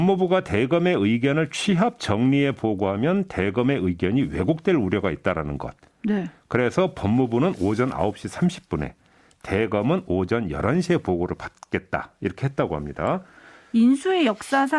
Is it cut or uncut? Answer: uncut